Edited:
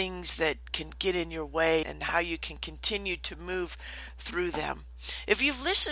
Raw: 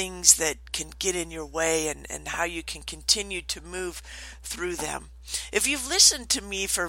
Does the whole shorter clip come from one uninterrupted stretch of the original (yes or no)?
no